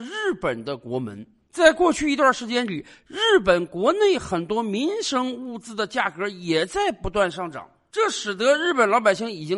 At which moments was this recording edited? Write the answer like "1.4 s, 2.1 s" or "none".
none